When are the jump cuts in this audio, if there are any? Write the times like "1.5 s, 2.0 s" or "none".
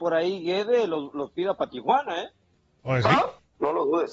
none